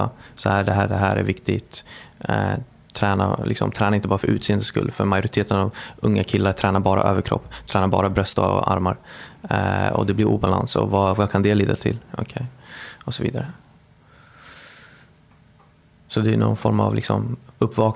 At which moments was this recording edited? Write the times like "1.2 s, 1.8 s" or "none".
none